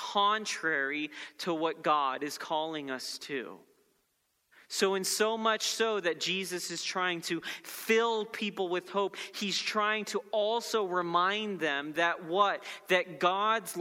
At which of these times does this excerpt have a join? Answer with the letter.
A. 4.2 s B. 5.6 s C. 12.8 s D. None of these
D